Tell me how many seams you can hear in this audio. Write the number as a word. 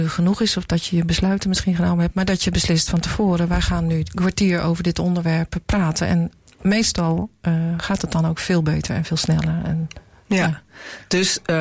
zero